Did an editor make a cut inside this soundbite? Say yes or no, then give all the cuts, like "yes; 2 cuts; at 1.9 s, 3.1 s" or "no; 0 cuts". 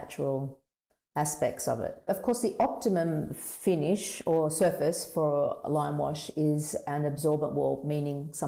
yes; 1 cut; at 2.1 s